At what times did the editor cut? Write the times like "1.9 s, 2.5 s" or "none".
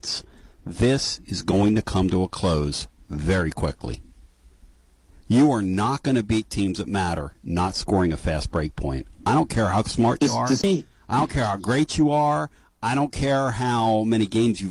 none